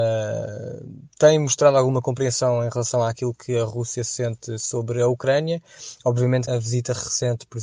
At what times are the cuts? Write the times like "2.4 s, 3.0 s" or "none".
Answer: 1.1 s, 6.5 s